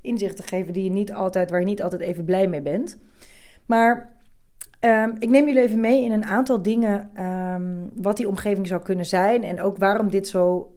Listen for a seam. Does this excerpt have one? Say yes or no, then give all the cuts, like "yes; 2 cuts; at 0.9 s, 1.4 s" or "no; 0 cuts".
no; 0 cuts